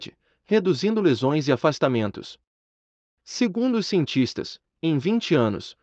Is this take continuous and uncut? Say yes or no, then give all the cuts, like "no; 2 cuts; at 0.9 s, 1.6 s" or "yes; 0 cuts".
yes; 0 cuts